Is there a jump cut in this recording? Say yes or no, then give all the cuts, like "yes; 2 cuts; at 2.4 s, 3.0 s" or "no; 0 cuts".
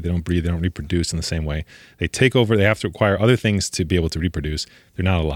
no; 0 cuts